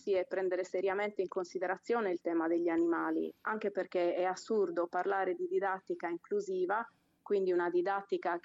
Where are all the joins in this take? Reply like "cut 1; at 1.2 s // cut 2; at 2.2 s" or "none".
none